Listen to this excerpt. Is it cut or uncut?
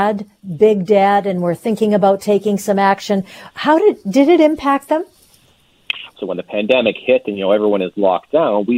cut